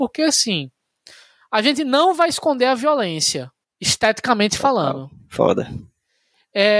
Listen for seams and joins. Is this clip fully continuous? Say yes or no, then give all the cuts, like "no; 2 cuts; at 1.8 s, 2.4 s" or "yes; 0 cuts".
no; 1 cut; at 3.6 s